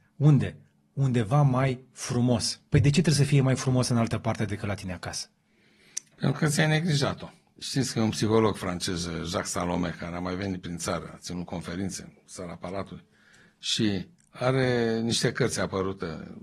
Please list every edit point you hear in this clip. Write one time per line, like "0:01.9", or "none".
0:02.7
0:07.6